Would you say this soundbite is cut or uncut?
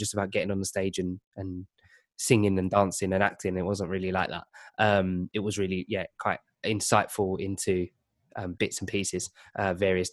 uncut